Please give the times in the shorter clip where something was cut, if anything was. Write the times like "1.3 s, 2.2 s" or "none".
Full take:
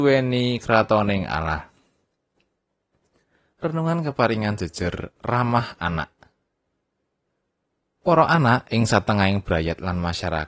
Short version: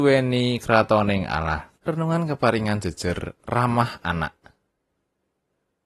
1.7 s